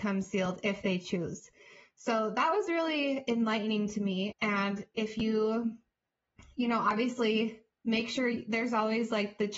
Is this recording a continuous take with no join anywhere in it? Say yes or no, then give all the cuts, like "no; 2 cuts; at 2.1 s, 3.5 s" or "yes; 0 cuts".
no; 1 cut; at 4.3 s